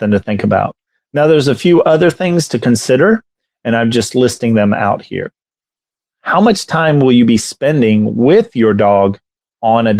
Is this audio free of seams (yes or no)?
yes